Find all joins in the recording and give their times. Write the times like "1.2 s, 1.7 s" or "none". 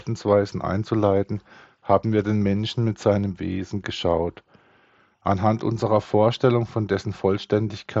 none